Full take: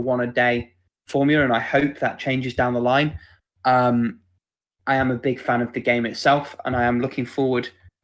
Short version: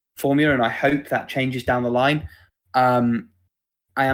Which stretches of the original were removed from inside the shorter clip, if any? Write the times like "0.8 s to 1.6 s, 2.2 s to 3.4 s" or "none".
none